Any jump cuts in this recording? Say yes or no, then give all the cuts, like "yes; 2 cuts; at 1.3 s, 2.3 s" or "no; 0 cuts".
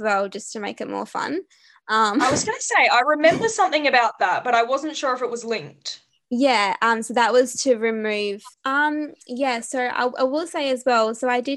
yes; 1 cut; at 8.5 s